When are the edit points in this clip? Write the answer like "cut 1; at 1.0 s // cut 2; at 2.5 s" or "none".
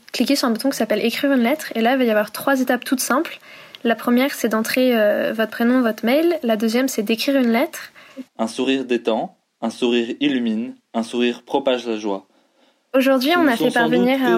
cut 1; at 8.3 s

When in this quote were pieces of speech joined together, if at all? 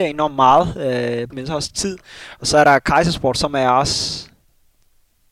cut 1; at 1.3 s

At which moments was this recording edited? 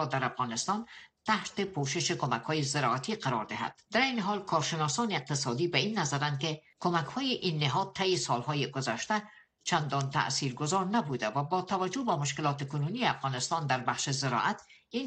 none

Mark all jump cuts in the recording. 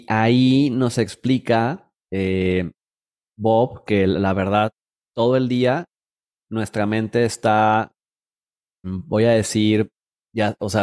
cut 1; at 8.8 s

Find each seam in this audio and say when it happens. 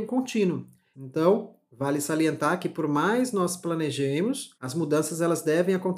cut 1; at 0.9 s // cut 2; at 4.5 s

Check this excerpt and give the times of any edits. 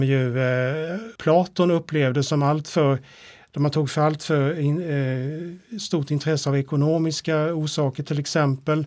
cut 1; at 1.2 s

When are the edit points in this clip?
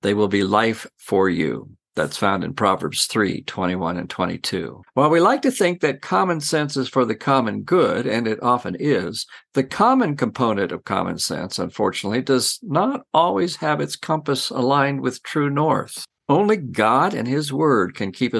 cut 1; at 4.9 s

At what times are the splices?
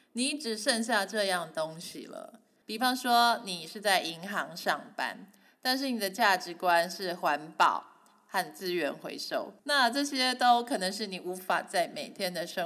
cut 1; at 2.6 s // cut 2; at 9.6 s

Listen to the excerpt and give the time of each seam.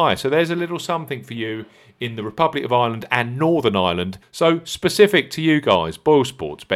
cut 1; at 4.2 s

